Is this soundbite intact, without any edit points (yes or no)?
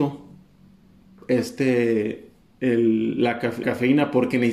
no